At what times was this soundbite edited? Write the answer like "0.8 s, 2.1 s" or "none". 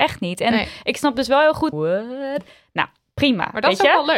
1.7 s